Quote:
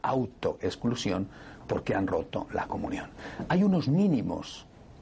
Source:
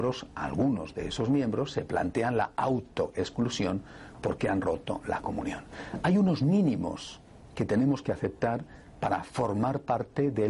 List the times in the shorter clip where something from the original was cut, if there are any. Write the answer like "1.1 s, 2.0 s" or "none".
none